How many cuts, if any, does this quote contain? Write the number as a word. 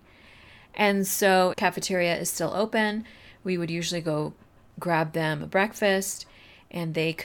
one